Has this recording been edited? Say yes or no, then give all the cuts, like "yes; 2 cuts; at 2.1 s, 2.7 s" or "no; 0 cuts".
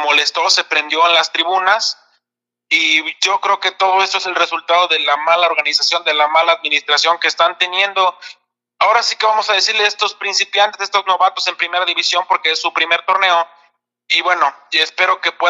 no; 0 cuts